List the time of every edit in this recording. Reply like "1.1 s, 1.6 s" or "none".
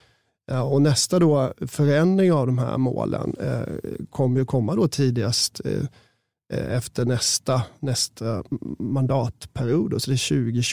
none